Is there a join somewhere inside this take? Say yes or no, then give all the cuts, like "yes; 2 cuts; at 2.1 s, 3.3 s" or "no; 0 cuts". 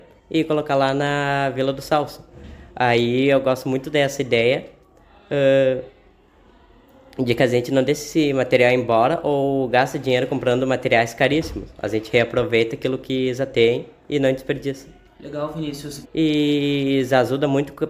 yes; 1 cut; at 16.0 s